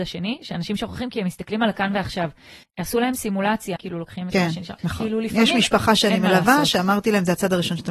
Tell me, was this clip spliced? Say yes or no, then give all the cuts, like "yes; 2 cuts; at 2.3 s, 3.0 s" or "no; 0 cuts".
yes; 3 cuts; at 2.6 s, 3.8 s, 4.8 s